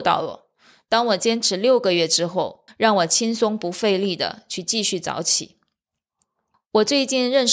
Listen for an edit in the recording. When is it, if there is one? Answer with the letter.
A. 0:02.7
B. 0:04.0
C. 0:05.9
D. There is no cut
A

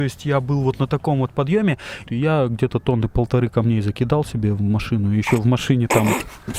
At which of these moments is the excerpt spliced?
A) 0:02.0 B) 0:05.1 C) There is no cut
A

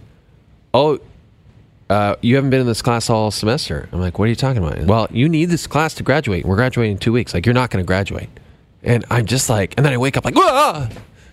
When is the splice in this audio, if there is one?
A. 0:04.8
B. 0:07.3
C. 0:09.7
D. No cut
A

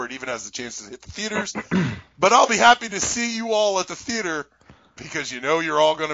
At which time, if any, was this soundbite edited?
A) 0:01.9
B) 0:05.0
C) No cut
B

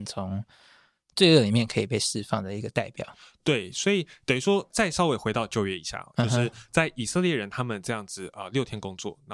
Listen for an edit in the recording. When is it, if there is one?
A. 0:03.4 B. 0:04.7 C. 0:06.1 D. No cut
B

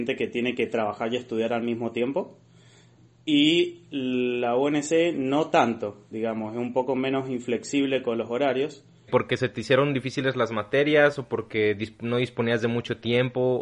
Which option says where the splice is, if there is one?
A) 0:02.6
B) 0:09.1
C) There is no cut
B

